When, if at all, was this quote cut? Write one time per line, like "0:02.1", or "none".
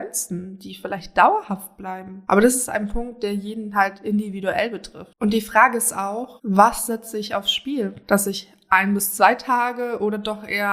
0:05.1

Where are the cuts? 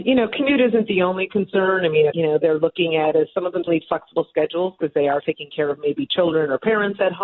0:02.1
0:03.7
0:05.2

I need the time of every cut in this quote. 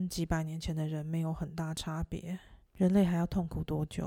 0:02.7

